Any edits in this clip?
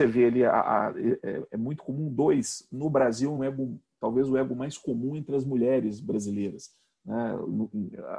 yes; 1 cut; at 3.4 s

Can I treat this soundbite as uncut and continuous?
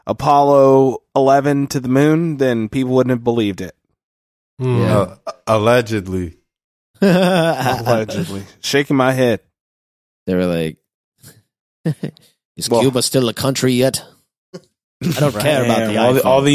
yes; 0 cuts

